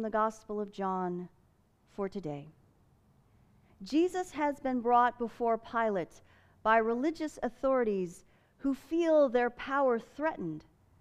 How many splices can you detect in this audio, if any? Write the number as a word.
zero